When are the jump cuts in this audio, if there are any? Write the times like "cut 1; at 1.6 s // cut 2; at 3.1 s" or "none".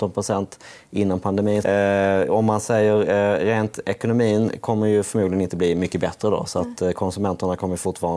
cut 1; at 1.6 s